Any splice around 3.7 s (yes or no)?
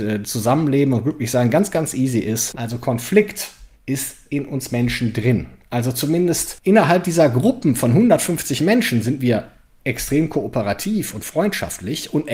yes